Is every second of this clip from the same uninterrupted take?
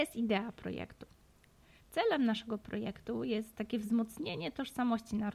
no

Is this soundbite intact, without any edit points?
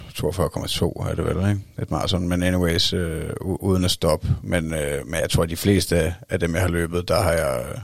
yes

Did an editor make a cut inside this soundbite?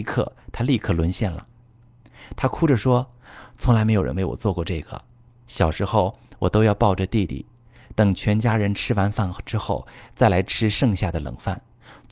no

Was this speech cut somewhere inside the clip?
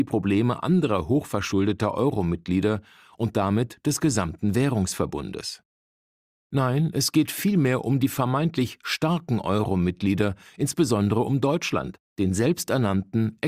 no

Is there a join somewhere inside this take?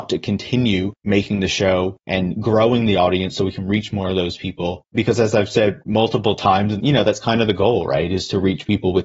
yes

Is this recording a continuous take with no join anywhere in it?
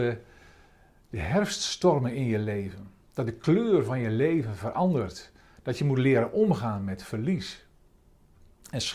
yes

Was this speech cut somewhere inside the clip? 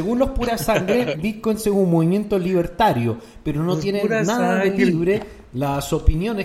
no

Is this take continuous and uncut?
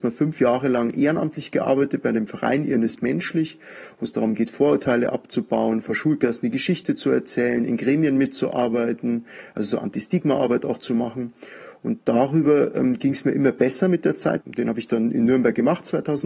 no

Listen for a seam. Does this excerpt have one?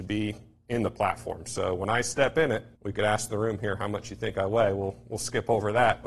yes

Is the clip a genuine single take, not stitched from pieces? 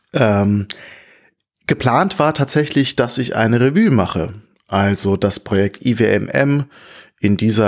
yes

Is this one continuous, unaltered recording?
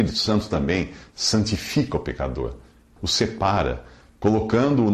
no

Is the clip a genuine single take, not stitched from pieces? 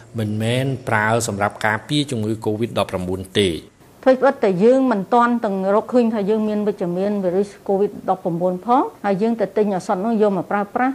no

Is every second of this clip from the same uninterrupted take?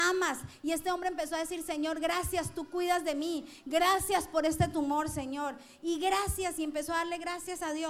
yes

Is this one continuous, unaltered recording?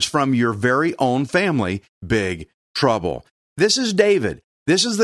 no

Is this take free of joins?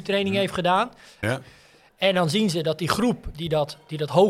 no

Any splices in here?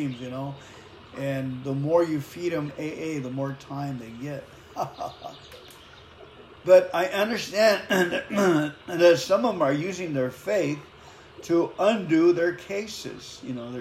no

